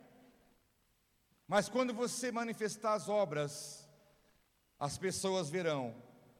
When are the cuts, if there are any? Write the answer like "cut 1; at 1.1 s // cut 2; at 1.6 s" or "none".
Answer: none